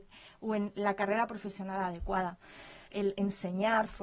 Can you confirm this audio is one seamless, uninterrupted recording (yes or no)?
no